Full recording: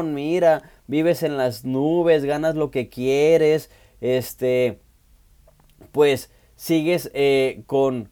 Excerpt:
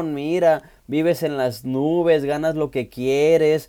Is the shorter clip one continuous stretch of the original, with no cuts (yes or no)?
yes